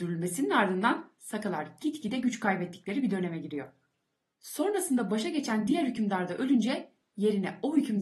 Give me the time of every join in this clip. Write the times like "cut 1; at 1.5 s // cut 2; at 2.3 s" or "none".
none